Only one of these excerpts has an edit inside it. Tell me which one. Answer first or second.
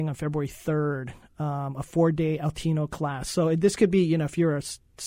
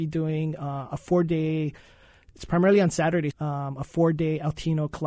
second